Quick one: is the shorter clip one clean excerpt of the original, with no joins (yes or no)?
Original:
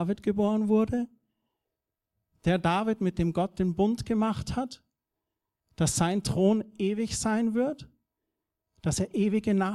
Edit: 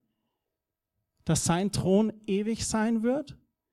no